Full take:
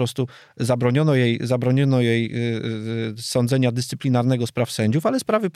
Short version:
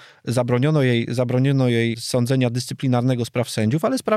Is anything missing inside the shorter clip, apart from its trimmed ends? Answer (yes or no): yes